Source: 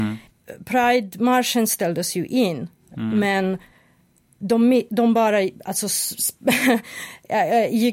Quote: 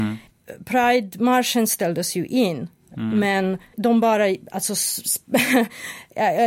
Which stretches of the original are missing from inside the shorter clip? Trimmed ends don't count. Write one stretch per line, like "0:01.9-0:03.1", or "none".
0:03.7-0:04.9